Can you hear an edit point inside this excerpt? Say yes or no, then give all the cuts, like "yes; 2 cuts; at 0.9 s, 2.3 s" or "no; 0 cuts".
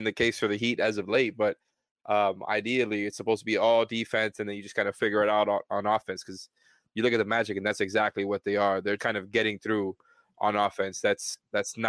yes; 1 cut; at 9.0 s